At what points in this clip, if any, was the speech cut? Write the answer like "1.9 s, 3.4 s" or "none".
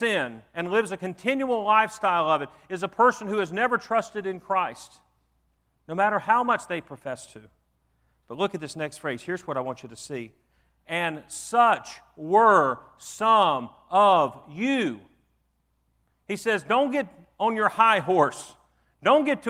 none